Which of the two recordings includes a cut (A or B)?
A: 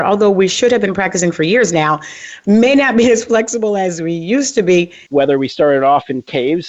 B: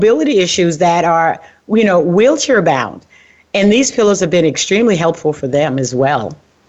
A